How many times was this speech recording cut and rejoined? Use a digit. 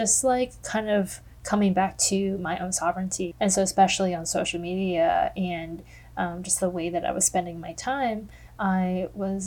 1